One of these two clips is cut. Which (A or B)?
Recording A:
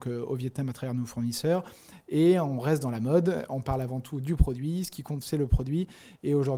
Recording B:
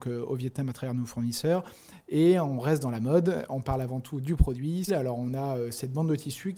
B